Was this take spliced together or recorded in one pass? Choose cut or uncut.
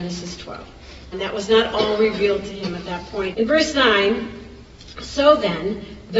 cut